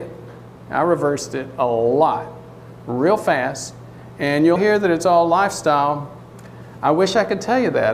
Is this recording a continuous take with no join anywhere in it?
no; 1 cut; at 4.6 s

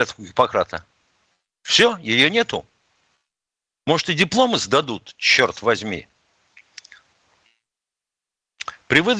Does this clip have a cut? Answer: no; 0 cuts

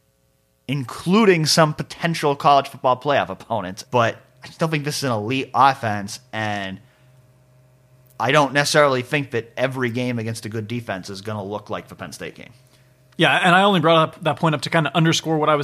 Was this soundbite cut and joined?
yes; 1 cut; at 3.8 s

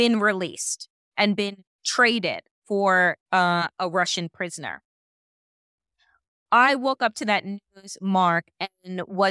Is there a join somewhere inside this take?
no; 0 cuts

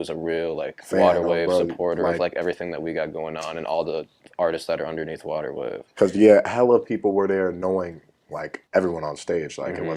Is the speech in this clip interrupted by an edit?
yes; 1 cut; at 8.7 s

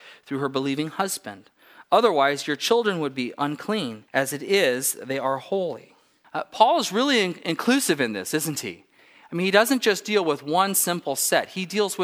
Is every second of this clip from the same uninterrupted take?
no; 2 cuts; at 4.1 s, 6.2 s

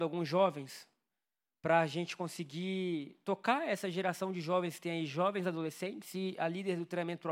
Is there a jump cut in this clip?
no; 0 cuts

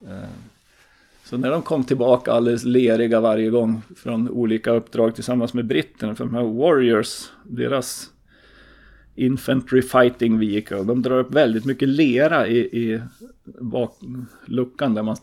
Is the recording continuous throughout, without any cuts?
yes; 0 cuts

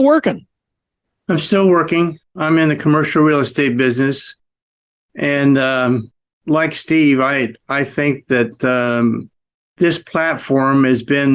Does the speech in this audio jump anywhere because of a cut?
no; 0 cuts

